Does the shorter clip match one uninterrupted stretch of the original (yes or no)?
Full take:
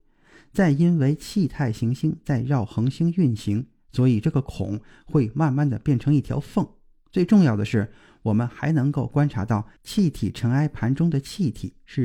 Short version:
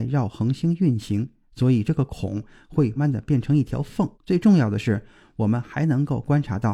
no